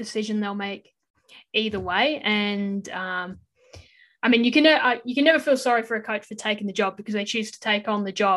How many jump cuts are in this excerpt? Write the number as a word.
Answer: zero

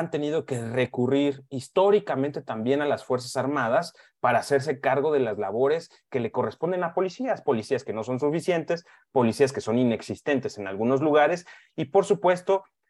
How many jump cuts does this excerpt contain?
zero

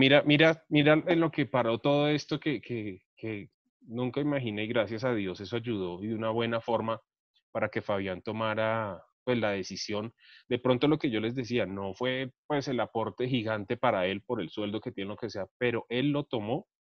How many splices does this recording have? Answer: zero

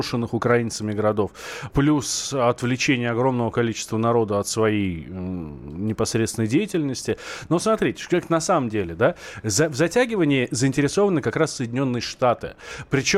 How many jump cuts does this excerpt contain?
one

